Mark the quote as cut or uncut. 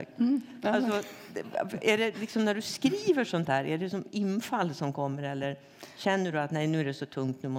uncut